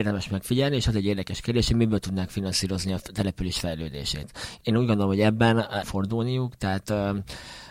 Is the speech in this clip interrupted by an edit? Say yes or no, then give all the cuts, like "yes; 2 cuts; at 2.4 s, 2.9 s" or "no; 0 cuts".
yes; 1 cut; at 5.8 s